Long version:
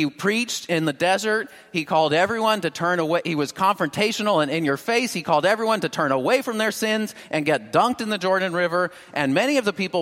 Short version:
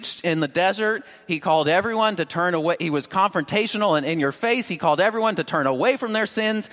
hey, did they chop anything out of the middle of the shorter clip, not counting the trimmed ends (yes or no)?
no